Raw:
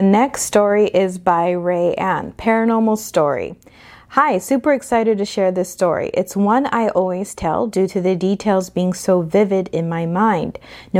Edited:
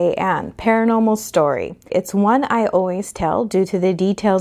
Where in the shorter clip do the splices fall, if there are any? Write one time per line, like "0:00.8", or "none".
0:01.9